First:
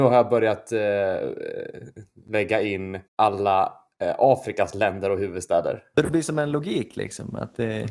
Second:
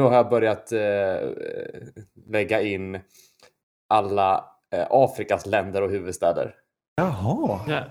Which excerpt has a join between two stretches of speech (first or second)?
first